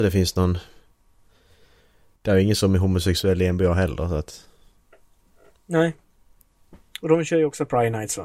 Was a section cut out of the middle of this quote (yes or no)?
no